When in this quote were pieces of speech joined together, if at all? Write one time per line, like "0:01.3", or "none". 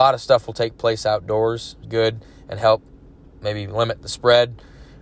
0:01.8